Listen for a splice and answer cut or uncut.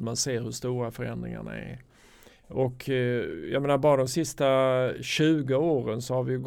uncut